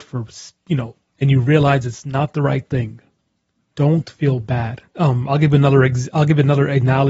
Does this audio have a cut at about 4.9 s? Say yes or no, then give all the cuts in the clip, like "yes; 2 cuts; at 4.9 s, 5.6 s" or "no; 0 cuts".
yes; 2 cuts; at 1.1 s, 4.9 s